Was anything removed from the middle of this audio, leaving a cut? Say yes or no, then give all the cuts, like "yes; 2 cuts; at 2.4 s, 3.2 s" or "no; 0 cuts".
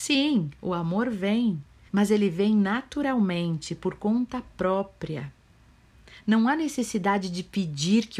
yes; 1 cut; at 1.9 s